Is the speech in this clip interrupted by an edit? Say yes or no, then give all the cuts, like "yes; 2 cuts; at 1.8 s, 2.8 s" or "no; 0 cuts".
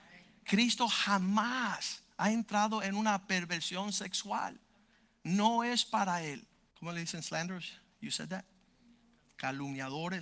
yes; 1 cut; at 6.7 s